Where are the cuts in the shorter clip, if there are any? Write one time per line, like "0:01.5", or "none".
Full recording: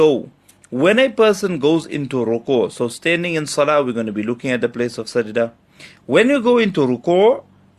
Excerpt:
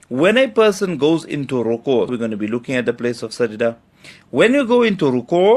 0:02.1